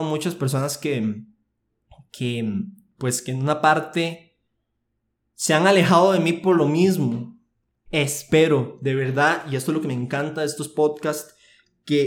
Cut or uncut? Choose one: cut